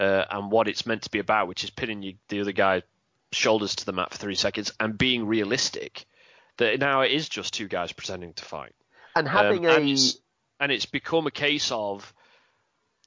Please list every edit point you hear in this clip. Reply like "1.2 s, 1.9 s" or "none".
none